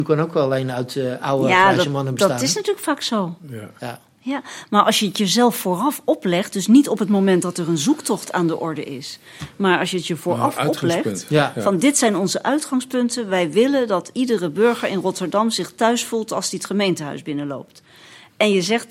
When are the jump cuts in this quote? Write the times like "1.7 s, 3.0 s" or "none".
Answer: none